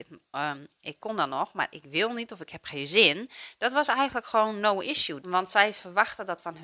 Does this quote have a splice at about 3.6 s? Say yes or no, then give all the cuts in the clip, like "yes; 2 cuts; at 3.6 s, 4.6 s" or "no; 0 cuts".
no; 2 cuts; at 1.0 s, 5.2 s